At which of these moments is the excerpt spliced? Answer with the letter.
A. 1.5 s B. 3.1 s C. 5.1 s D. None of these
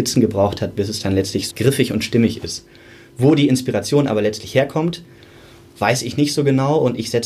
A